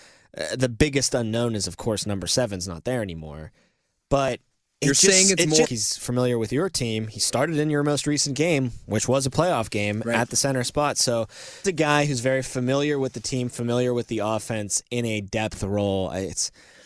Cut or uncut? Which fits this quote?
cut